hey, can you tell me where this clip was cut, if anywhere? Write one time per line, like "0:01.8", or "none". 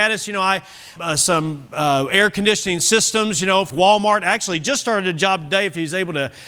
0:01.0
0:03.7